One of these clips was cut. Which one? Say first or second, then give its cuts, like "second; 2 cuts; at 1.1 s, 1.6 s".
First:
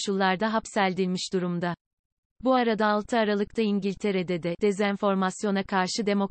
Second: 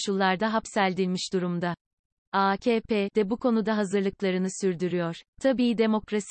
second; 2 cuts; at 2.2 s, 5.2 s